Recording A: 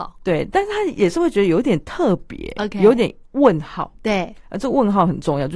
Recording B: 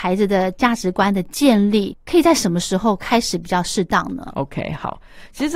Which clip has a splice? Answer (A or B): B